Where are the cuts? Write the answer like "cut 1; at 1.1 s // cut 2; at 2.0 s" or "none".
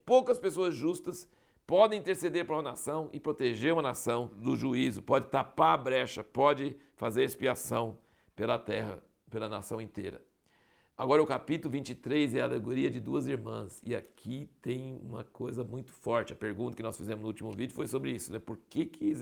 none